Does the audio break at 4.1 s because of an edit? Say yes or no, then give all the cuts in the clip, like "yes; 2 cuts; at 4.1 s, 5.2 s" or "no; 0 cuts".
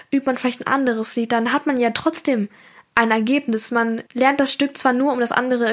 yes; 1 cut; at 4.1 s